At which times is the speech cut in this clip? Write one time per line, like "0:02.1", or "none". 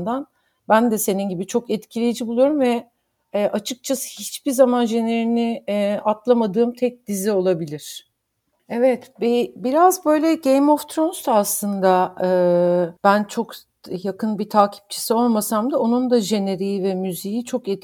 0:08.6
0:13.0